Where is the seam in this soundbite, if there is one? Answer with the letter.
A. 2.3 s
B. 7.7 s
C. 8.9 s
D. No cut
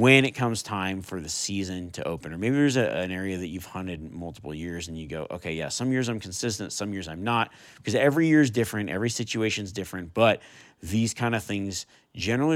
B